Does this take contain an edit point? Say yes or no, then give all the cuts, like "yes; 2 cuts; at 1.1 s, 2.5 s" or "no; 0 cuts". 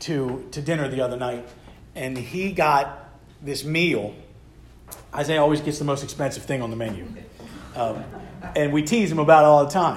no; 0 cuts